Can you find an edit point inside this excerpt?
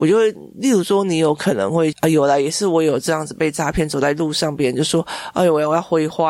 yes; 1 cut; at 1.9 s

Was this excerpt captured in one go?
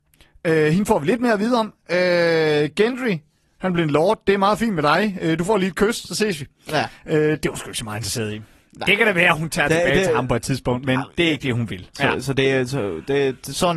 no; 1 cut; at 11.9 s

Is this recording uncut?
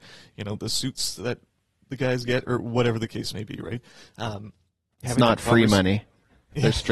no; 1 cut; at 5.0 s

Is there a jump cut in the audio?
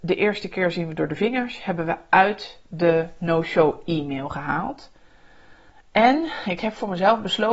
no; 0 cuts

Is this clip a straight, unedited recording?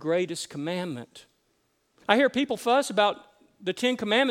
no; 1 cut; at 2.0 s

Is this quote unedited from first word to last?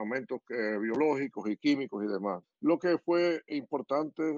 no; 1 cut; at 2.4 s

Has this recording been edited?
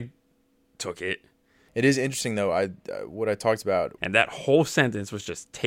yes; 2 cuts; at 1.7 s, 4.0 s

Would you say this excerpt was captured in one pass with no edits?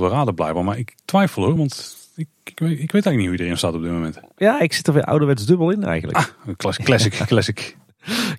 yes; 0 cuts

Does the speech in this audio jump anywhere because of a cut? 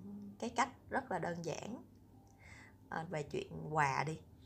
yes; 1 cut; at 3.1 s

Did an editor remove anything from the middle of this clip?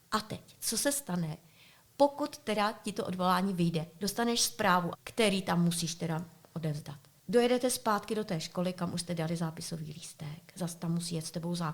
yes; 1 cut; at 4.9 s

